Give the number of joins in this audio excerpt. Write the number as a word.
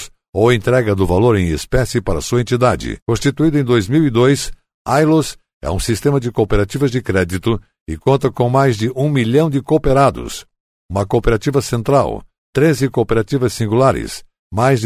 zero